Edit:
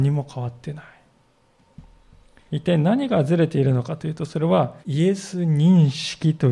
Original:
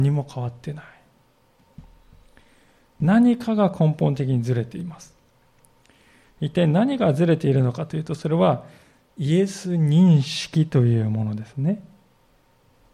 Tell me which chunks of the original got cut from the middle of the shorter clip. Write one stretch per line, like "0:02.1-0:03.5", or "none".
0:02.5-0:06.4
0:08.7-0:09.1